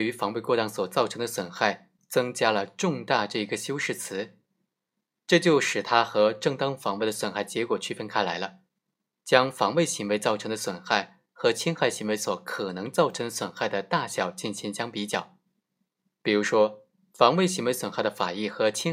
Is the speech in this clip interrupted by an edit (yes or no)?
yes